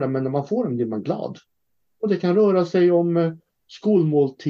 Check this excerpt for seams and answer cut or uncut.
uncut